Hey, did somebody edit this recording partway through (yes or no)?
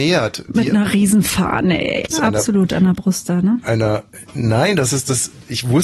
yes